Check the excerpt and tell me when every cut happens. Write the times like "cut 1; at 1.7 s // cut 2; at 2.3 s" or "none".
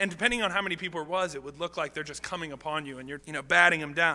cut 1; at 3.2 s